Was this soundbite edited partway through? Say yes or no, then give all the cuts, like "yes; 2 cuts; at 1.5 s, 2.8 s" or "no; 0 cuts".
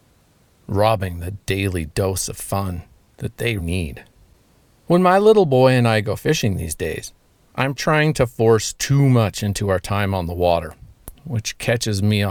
yes; 2 cuts; at 3.6 s, 7.7 s